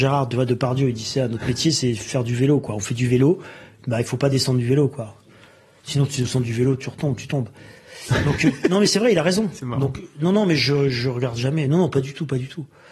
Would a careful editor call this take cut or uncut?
uncut